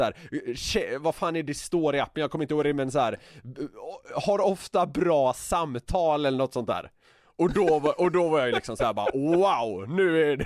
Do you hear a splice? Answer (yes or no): no